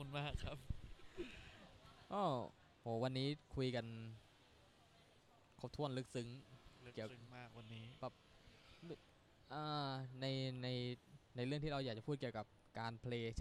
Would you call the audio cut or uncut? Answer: cut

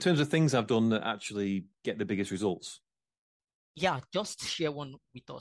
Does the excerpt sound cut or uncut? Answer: uncut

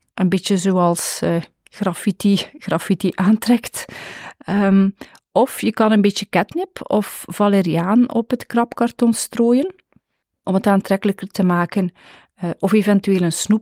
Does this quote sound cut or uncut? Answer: uncut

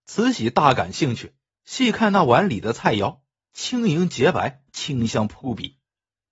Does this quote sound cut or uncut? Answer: cut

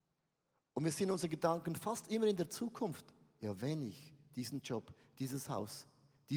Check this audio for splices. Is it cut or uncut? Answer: uncut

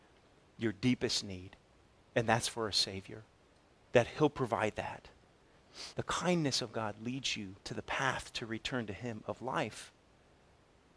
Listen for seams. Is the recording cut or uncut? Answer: cut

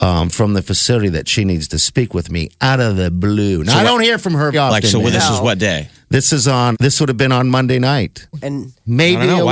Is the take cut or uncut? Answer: cut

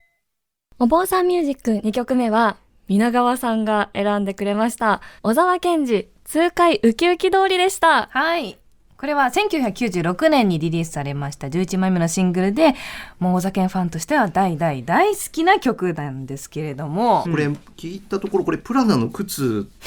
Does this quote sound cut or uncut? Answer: cut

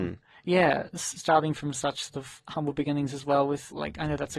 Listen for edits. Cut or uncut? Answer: uncut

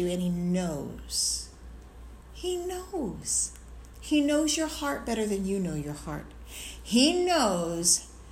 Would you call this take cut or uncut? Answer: uncut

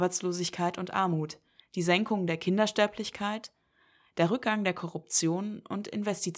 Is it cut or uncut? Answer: cut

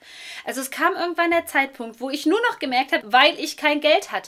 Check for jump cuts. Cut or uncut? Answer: cut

